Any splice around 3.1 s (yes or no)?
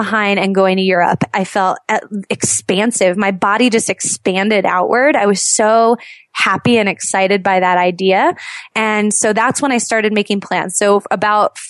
no